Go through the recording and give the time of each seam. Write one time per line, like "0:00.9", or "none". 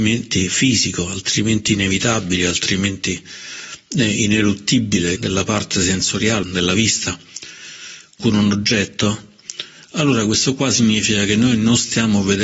0:05.2
0:06.4
0:08.2